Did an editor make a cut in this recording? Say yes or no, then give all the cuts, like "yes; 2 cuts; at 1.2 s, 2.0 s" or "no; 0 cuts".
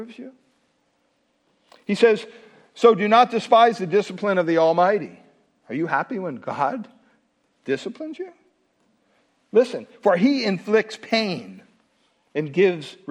no; 0 cuts